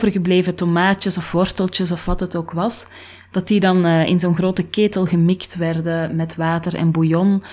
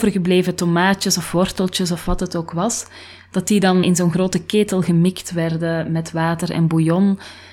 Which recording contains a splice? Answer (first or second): second